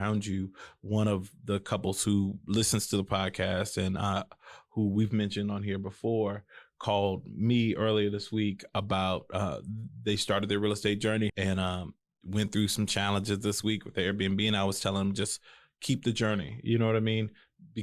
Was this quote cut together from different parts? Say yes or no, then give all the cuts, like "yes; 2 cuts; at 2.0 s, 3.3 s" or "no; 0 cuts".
yes; 1 cut; at 11.3 s